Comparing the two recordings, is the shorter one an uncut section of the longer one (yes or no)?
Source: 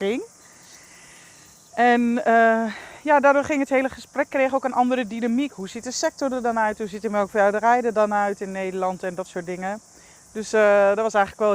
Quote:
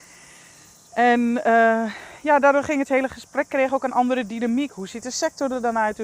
yes